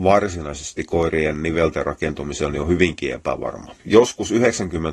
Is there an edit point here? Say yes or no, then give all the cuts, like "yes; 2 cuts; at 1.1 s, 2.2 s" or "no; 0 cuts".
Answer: yes; 1 cut; at 3.8 s